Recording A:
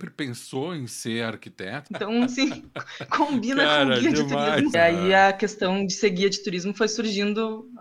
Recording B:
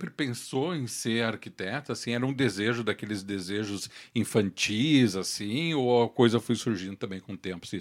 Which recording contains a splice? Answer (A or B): A